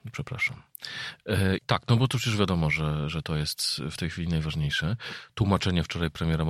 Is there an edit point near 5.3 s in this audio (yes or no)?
no